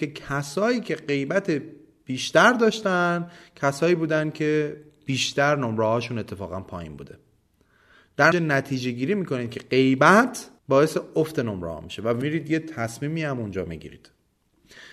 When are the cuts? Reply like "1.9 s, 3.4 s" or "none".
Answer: 8.3 s, 10.6 s

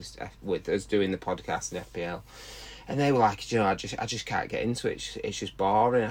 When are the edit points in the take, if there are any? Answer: none

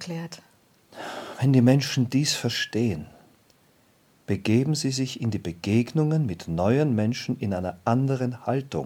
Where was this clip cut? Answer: none

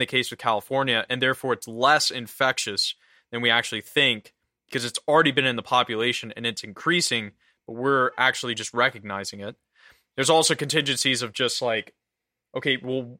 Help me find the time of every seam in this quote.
none

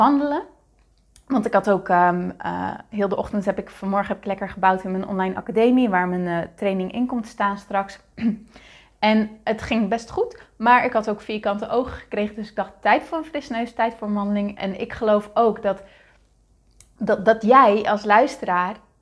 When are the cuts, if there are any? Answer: 14.6 s

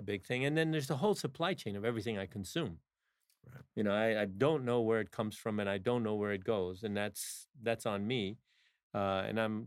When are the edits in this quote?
none

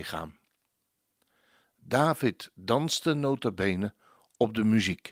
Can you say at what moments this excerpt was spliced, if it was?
none

